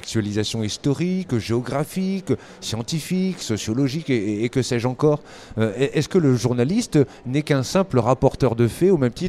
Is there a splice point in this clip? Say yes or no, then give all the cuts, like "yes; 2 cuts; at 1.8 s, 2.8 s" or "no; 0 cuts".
no; 0 cuts